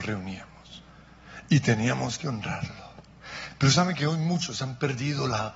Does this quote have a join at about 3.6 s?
no; 0 cuts

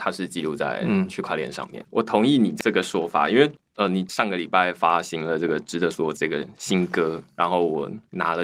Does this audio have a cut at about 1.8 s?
yes; 1 cut; at 1.8 s

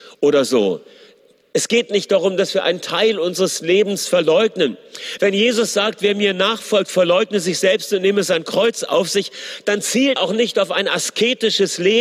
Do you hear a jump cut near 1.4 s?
no; 2 cuts; at 5.2 s, 10.2 s

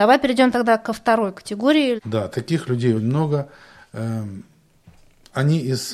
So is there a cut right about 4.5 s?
no; 2 cuts; at 2.0 s, 3.0 s

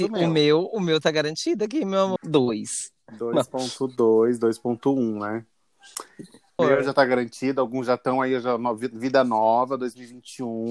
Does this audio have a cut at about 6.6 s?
yes; 2 cuts; at 2.2 s, 6.6 s

